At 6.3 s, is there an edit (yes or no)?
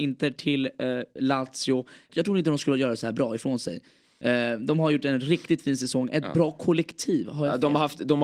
no